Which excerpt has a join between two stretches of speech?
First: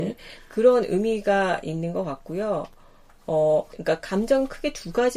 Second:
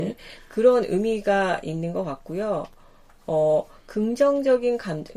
first; 1 cut; at 3.7 s

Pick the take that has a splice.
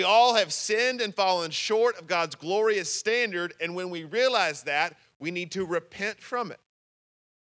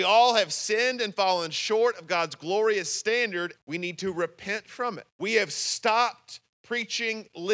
second; 2 cuts; at 3.6 s, 5.1 s

